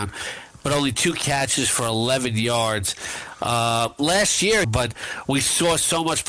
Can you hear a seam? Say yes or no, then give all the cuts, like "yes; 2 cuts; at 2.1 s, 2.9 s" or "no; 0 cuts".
yes; 1 cut; at 4.6 s